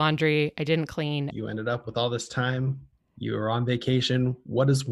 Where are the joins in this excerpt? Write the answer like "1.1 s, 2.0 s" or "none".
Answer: 1.3 s